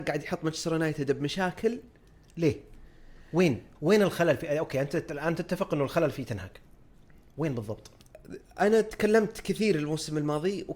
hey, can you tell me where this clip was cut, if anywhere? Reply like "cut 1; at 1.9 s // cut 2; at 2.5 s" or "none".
cut 1; at 3.8 s